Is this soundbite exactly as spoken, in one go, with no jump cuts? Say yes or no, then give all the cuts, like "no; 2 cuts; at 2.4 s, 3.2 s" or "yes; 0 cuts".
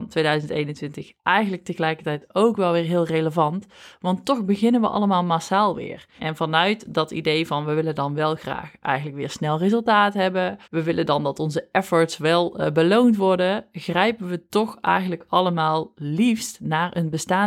no; 2 cuts; at 6.2 s, 10.6 s